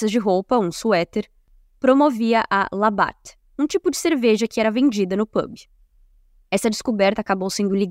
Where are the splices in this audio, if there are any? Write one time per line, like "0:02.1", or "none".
none